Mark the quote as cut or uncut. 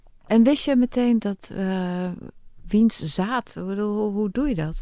cut